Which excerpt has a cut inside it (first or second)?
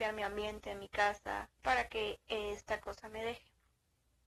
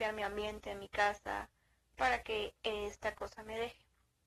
first